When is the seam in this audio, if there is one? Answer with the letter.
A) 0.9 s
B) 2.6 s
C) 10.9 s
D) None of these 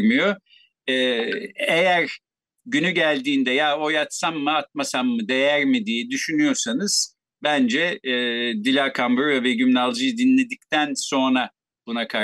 D